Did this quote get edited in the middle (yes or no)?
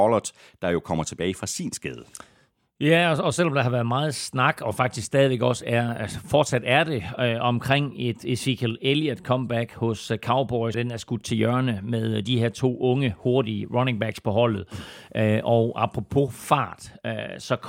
yes